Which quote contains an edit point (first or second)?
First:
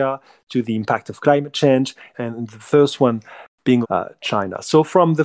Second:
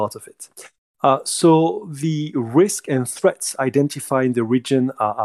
first